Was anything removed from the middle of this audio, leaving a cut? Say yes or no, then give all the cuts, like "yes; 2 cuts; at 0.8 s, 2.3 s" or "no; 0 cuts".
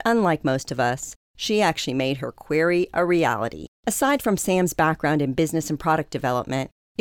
no; 0 cuts